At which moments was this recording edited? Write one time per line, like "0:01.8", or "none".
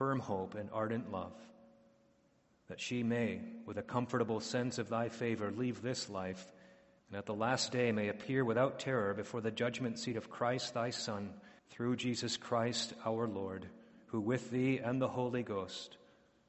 0:07.0
0:11.6